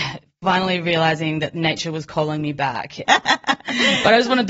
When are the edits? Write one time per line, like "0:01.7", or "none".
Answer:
0:03.1